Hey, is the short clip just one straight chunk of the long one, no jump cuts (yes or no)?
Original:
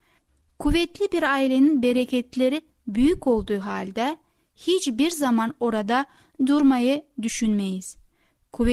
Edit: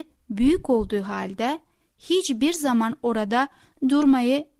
yes